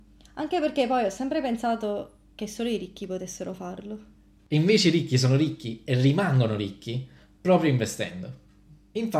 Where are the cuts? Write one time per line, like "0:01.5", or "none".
none

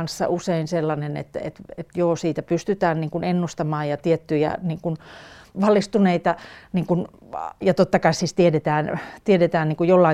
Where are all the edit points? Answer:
0:05.5
0:07.6

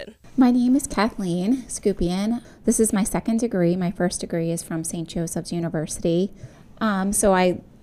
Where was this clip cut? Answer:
0:02.4

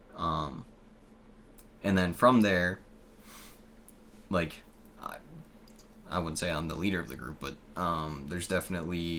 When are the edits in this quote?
none

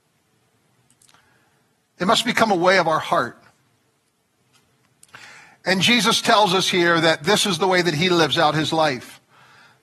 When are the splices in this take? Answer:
none

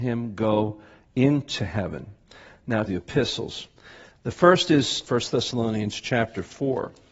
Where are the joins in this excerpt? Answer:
0:02.9

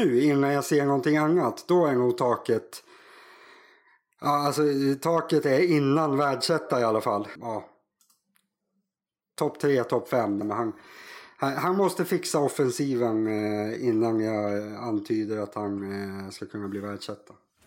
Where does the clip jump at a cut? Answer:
0:07.4
0:10.4

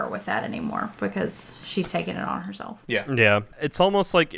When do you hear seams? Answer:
0:02.8

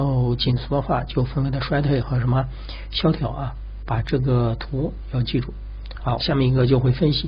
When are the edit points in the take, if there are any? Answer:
0:06.2

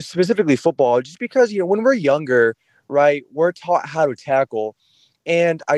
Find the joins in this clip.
none

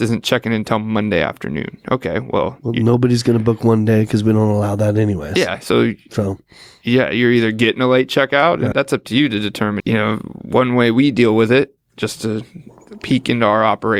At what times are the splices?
0:08.7
0:09.8

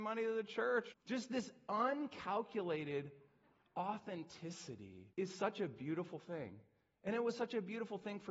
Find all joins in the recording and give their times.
0:00.9
0:05.1

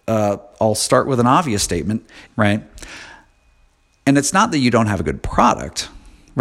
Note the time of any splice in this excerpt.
0:02.3

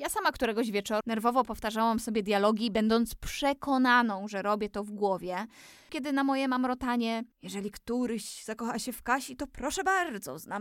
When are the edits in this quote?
0:01.0
0:05.9
0:07.3

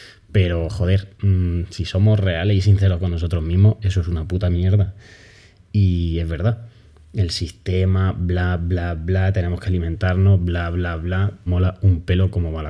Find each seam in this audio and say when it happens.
0:11.5

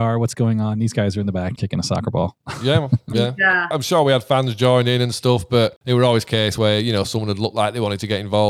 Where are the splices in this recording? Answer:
0:01.6
0:03.7

